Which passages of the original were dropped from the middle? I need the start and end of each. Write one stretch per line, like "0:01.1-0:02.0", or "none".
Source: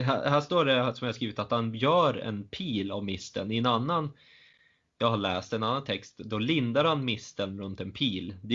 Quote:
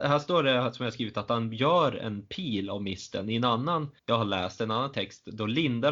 0:04.2-0:04.9